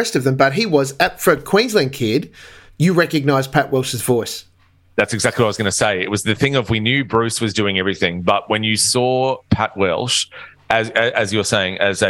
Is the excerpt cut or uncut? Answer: uncut